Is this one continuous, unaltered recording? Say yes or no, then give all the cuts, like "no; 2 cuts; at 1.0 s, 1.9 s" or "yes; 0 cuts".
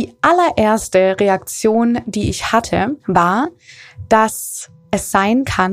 no; 1 cut; at 3.0 s